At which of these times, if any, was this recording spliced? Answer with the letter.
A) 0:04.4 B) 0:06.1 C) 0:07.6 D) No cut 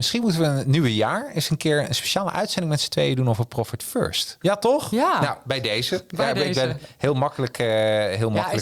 A